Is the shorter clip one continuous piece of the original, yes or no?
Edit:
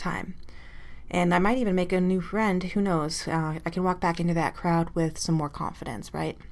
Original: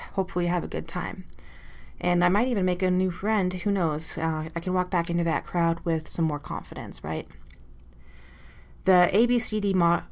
yes